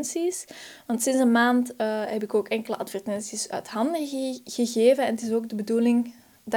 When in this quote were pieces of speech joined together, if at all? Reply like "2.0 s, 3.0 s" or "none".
none